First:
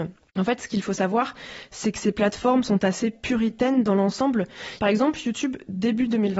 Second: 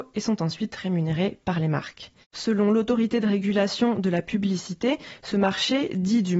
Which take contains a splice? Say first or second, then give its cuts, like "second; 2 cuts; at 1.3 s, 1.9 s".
first; 1 cut; at 4.8 s